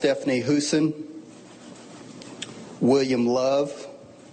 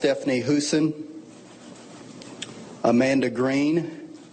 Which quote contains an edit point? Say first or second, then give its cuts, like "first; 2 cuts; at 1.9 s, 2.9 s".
first; 1 cut; at 2.8 s